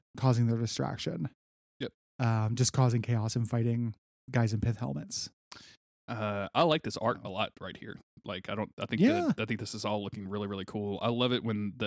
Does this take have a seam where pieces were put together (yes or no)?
no